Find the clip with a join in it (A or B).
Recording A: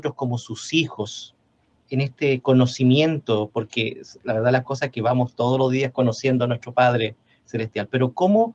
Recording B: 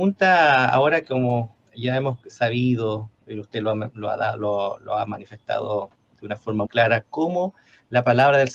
B